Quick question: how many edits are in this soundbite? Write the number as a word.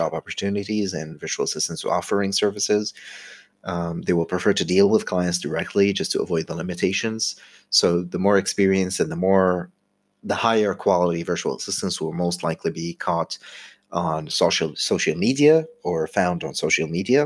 one